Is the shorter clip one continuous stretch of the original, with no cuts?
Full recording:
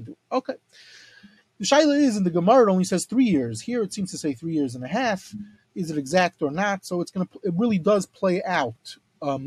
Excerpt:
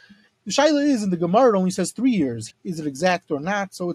no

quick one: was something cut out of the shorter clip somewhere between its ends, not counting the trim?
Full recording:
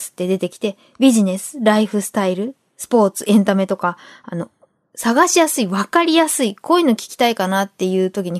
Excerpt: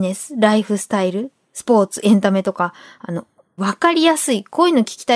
yes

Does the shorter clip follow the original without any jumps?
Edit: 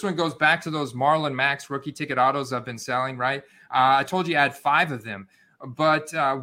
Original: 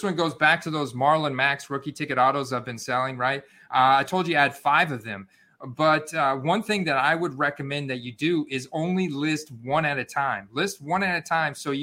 yes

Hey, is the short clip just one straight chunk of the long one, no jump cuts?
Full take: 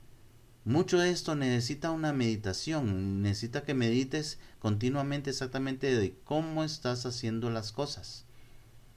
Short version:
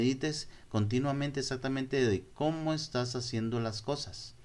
yes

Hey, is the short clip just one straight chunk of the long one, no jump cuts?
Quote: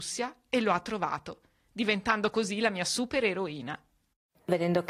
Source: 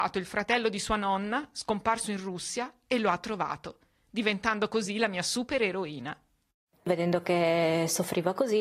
yes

